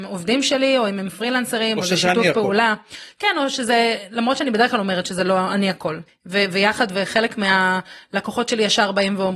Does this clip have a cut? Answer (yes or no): yes